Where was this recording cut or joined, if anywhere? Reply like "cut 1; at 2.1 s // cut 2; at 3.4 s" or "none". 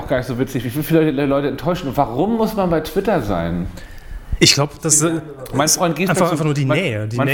none